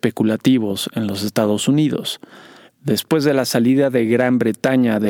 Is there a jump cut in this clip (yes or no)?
yes